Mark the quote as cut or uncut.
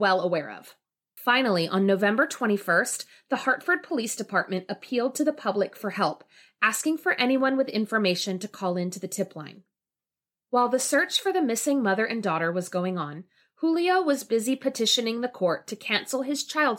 cut